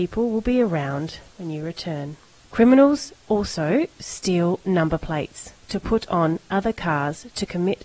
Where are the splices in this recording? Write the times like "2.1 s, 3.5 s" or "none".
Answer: 2.4 s